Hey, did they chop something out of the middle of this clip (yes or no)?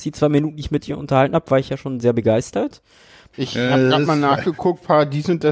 yes